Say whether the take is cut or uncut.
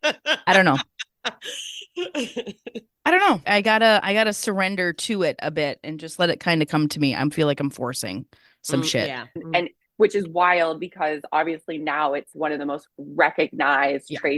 cut